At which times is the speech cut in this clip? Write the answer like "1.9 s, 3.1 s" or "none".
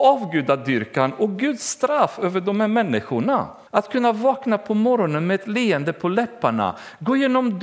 3.7 s